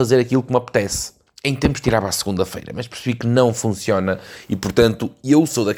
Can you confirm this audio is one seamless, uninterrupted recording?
no; 1 cut; at 1.3 s

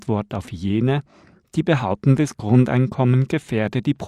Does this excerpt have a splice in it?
no; 0 cuts

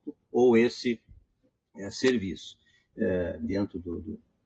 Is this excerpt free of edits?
no; 1 cut; at 2.9 s

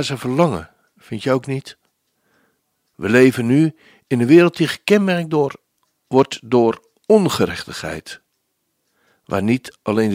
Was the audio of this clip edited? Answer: no; 0 cuts

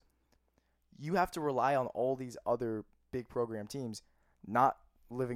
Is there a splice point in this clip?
no; 0 cuts

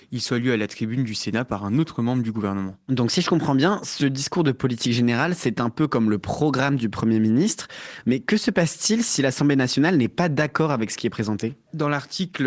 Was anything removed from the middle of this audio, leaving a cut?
no; 0 cuts

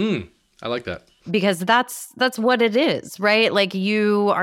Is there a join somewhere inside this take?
no; 0 cuts

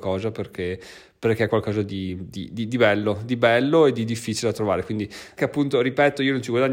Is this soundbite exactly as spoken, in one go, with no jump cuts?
no; 1 cut; at 5.4 s

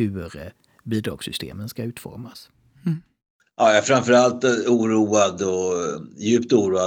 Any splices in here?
no; 0 cuts

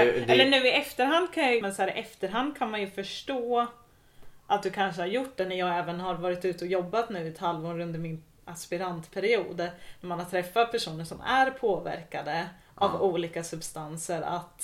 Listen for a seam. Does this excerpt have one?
yes; 1 cut; at 1.6 s

